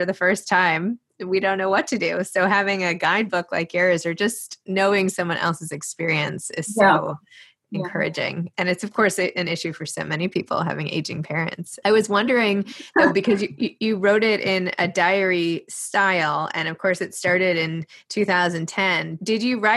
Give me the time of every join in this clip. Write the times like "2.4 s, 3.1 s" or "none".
none